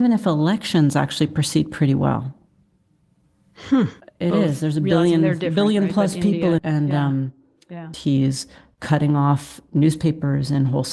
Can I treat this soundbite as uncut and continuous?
no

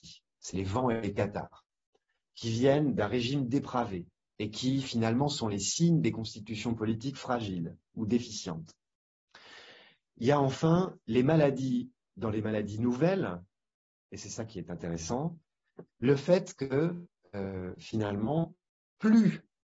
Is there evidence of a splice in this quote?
yes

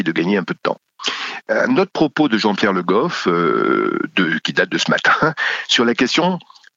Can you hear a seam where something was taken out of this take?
yes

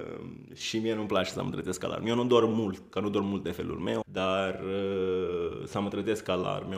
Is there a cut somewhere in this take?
yes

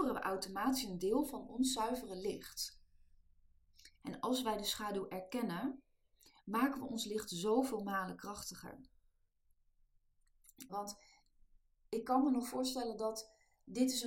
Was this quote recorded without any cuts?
no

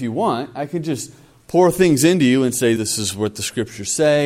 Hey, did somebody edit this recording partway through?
yes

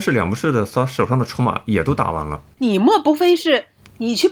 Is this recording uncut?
no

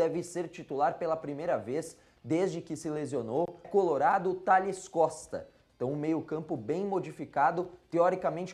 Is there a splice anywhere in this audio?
yes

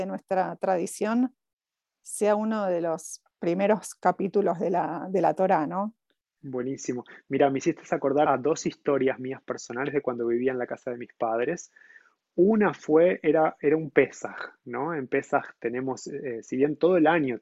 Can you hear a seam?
yes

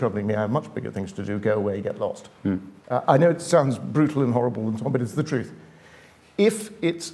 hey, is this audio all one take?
no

